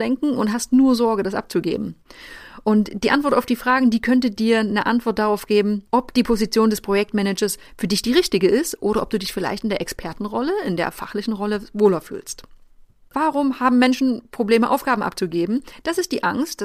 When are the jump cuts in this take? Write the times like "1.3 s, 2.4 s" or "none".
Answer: 13.1 s